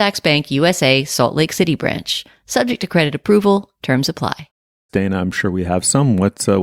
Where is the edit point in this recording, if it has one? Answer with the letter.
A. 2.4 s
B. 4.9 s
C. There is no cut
B